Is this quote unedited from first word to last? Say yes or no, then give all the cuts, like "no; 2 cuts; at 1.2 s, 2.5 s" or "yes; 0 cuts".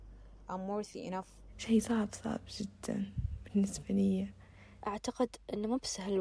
no; 1 cut; at 2.1 s